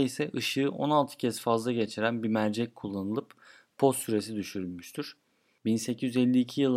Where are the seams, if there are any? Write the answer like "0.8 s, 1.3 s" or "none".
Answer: none